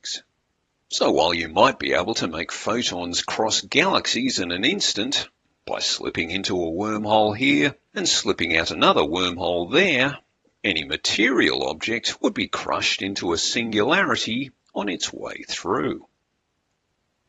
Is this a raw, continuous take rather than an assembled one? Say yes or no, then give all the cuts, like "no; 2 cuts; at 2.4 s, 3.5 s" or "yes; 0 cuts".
yes; 0 cuts